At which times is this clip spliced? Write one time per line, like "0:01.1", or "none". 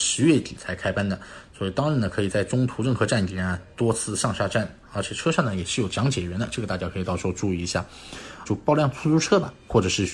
0:08.4